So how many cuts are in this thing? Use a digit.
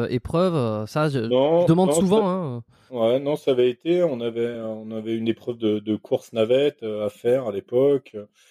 0